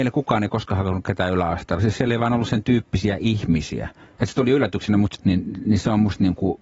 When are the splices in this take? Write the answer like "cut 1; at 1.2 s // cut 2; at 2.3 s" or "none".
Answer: cut 1; at 5.2 s